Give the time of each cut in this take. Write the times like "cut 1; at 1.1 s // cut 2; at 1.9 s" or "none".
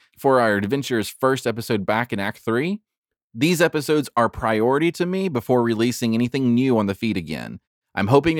cut 1; at 3.2 s